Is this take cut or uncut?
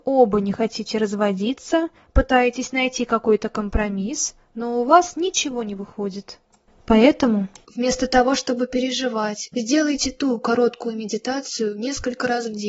cut